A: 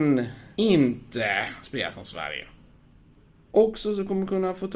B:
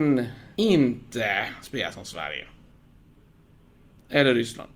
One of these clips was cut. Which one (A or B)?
A